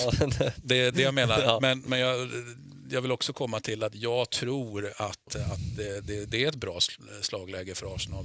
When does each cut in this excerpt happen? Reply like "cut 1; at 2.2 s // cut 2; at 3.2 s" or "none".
cut 1; at 0.9 s